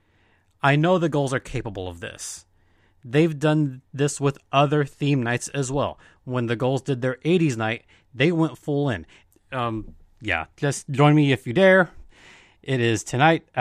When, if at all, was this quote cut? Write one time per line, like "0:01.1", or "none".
0:09.3